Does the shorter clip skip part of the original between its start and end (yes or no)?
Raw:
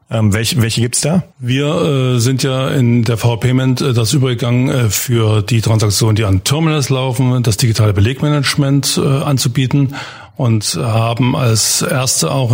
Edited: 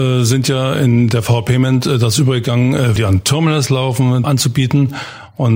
yes